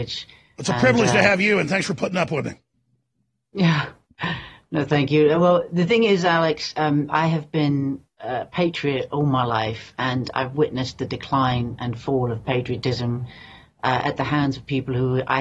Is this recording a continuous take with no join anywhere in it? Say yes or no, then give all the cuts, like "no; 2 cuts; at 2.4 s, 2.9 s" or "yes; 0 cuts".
yes; 0 cuts